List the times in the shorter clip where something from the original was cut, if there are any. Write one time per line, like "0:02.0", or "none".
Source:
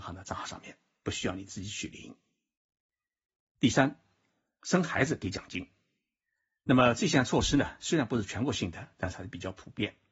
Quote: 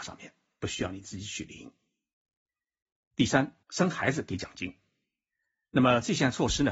0:03.6